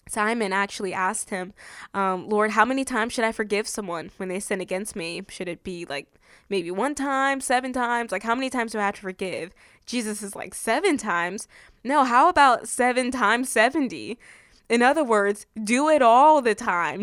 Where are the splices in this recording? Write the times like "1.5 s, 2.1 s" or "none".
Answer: none